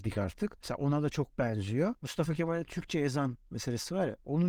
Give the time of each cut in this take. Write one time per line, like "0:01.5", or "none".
none